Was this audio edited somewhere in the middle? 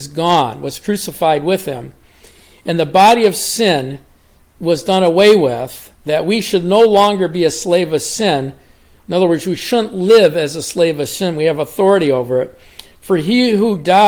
no; 0 cuts

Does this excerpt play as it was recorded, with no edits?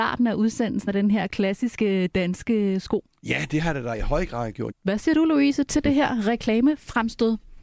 no; 1 cut; at 4.7 s

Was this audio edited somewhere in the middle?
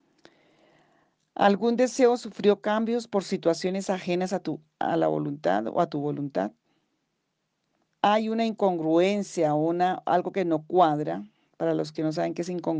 yes; 1 cut; at 7.8 s

